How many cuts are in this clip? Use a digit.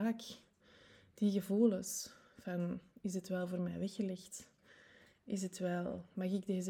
0